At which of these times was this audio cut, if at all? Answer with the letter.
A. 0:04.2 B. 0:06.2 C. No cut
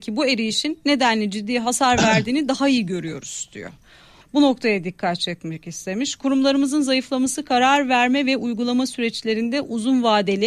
A